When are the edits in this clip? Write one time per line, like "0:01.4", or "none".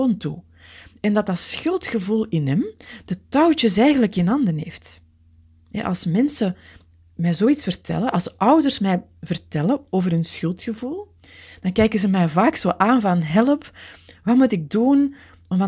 none